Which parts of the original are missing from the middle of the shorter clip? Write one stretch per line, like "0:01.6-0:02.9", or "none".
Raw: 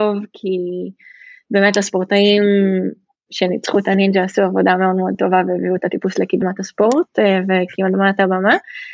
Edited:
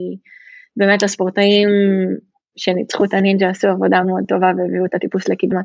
0:04.8-0:04.9